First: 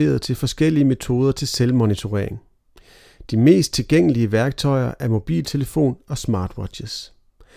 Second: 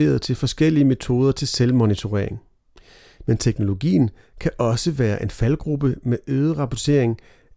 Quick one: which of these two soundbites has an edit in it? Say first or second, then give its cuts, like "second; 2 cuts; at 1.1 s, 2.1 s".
second; 1 cut; at 3.2 s